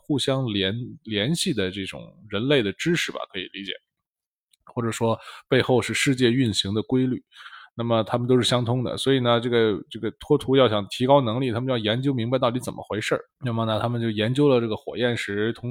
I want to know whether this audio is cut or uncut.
cut